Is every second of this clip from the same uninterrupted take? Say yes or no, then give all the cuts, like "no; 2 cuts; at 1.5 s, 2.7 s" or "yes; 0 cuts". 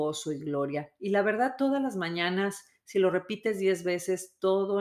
yes; 0 cuts